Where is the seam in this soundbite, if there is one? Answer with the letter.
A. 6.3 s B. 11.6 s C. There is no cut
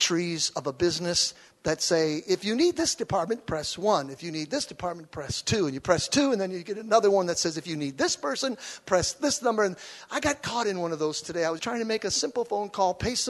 B